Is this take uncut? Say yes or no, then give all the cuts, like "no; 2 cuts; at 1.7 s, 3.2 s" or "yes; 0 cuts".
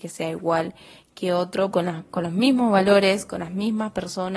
no; 1 cut; at 1.7 s